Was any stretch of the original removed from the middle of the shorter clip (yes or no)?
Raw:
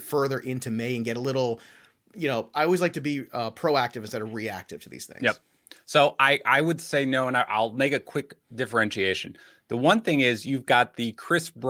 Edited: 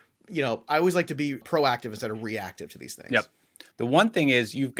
yes